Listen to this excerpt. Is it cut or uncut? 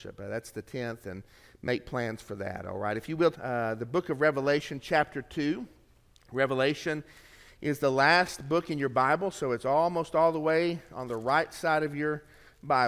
cut